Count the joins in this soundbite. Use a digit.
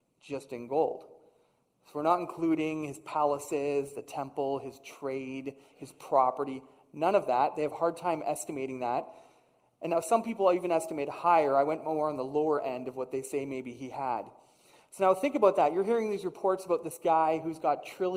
0